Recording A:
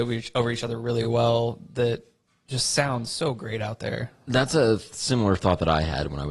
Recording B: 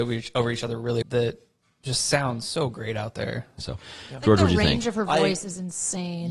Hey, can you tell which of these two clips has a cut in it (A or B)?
B